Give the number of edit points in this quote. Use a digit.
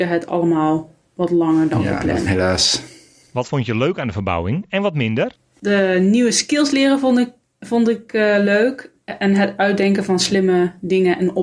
1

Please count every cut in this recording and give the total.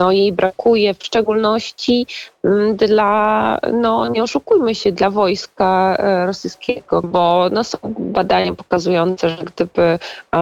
1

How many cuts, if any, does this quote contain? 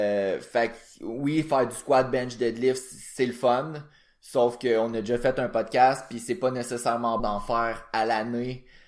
1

